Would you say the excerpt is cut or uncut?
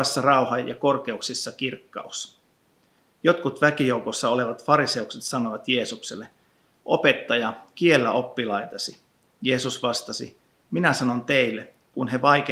uncut